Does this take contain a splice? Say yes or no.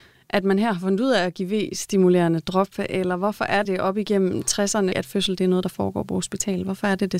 yes